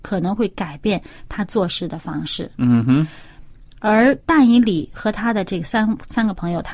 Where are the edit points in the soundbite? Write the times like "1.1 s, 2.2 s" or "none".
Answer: none